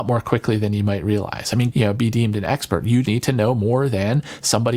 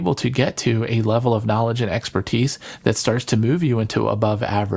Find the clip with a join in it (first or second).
first